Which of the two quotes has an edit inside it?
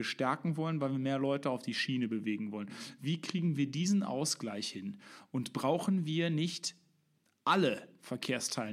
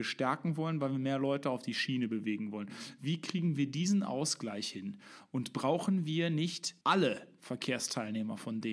second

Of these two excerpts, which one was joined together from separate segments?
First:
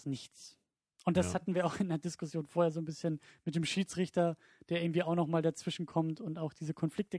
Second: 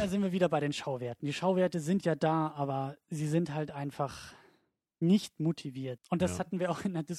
second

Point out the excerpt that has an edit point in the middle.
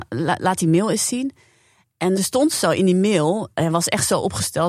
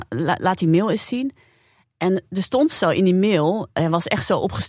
first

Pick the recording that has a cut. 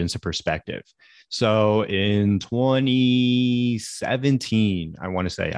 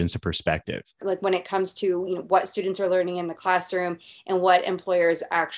second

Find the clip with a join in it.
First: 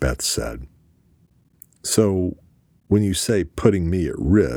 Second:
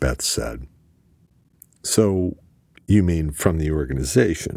second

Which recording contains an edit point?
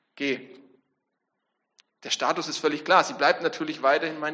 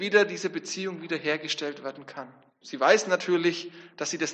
second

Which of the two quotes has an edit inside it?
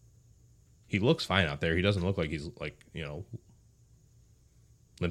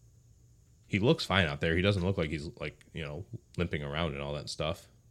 second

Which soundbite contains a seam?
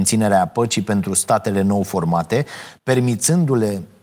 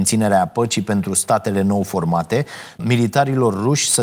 second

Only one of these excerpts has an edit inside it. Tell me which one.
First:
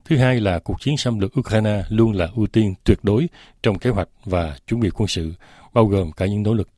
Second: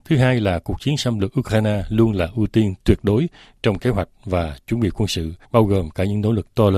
second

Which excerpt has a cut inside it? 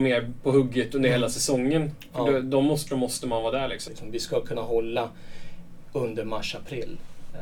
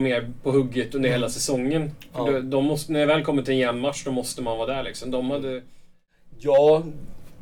first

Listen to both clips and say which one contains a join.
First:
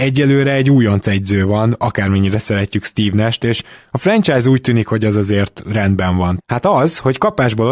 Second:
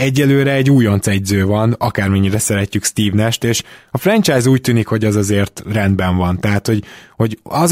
first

